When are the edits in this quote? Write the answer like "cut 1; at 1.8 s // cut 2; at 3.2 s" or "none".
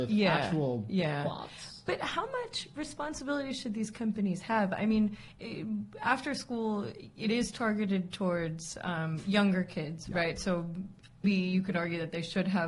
cut 1; at 11.2 s